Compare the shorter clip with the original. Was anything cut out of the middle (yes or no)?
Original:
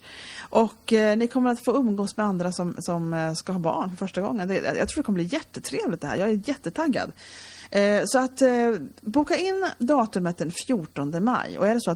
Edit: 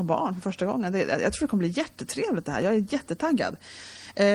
no